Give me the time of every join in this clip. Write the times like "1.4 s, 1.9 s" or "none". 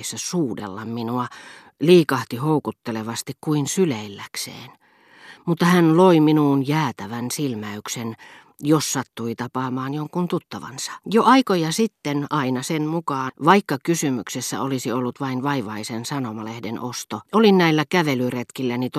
11.0 s, 13.3 s, 17.2 s

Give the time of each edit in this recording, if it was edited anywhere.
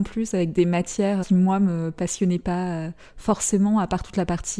1.2 s

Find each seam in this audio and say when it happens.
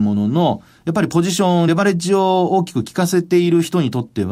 none

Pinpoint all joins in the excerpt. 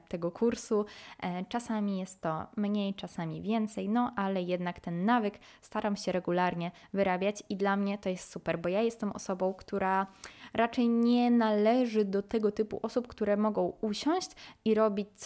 none

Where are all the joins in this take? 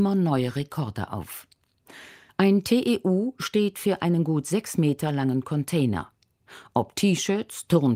2.3 s

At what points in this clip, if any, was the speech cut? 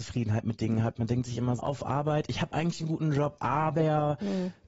1.6 s

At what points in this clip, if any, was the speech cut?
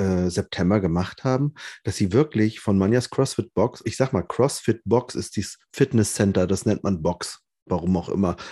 3.8 s

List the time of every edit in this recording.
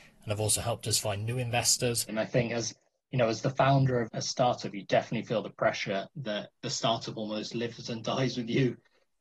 2.1 s, 4.1 s

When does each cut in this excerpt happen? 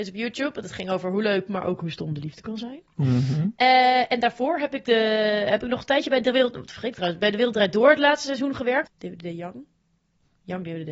8.9 s

